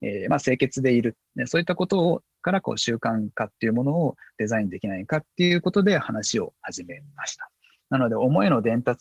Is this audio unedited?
no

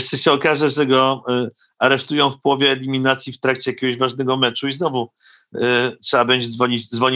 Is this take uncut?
yes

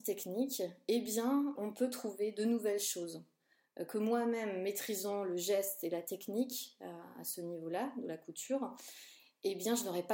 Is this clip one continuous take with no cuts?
no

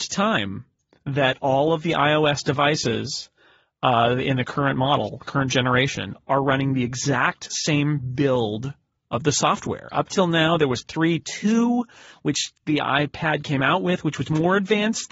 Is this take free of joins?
yes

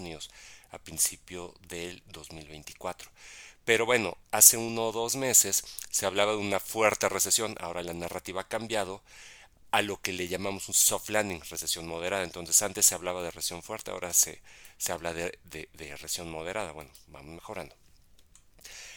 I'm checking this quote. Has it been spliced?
no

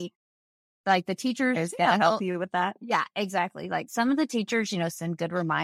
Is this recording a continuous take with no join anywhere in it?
yes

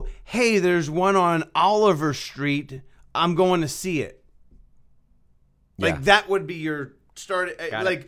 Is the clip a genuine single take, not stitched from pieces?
yes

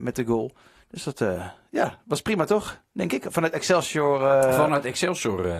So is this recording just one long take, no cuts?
yes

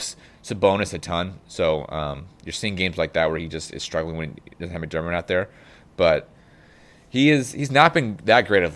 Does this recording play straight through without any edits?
yes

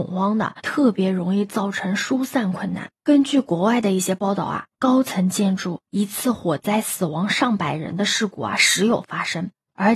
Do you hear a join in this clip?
no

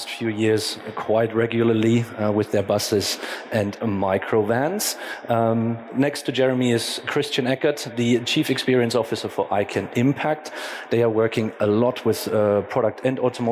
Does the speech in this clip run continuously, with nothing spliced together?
yes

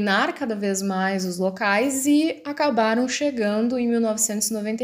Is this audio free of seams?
yes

